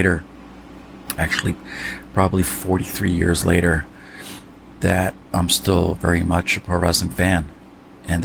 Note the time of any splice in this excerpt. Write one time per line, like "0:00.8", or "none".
0:05.2